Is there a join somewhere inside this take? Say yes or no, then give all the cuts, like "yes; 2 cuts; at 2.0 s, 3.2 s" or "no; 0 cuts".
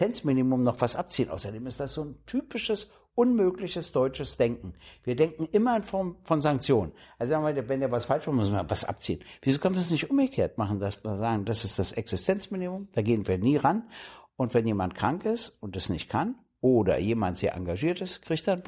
no; 0 cuts